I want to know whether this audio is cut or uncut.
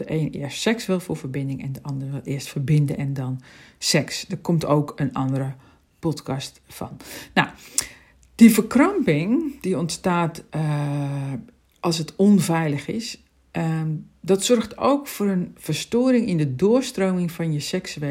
uncut